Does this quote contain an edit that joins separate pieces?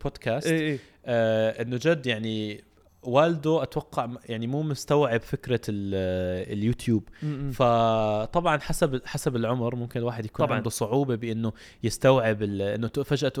no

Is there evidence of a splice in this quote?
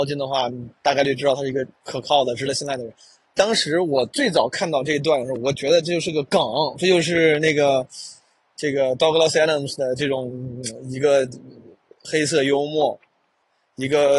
no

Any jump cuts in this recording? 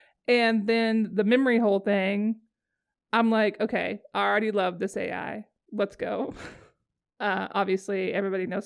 no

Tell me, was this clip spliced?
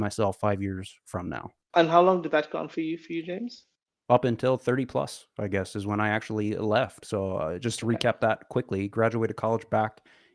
no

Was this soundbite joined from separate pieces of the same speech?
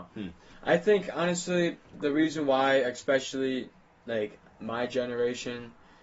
no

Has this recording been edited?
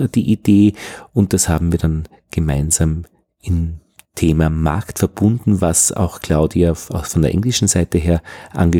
no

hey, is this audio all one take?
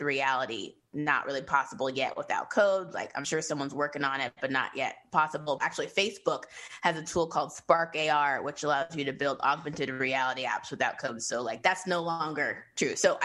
no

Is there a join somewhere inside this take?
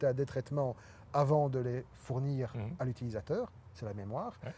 no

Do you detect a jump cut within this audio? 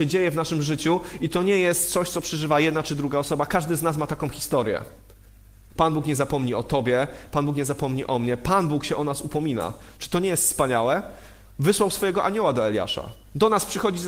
yes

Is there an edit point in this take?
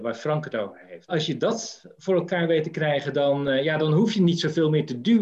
yes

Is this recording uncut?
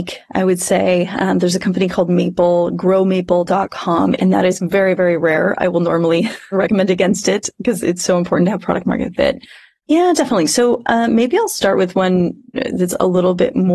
no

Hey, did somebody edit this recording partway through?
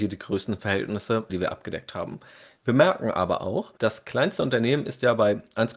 yes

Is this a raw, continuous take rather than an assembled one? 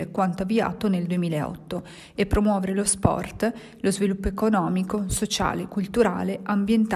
yes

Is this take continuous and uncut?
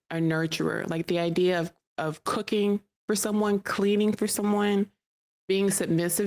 yes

